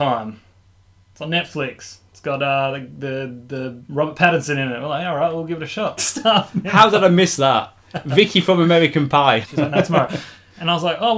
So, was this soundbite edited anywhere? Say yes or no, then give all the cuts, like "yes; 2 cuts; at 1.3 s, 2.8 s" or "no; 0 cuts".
yes; 2 cuts; at 6.0 s, 9.4 s